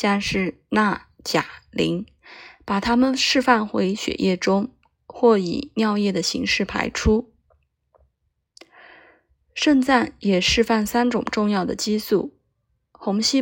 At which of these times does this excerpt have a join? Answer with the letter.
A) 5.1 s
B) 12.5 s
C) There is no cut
C